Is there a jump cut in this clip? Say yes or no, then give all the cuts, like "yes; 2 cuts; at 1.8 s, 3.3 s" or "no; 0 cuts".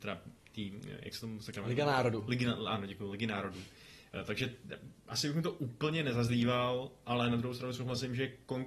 no; 0 cuts